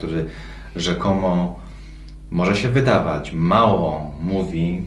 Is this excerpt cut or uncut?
uncut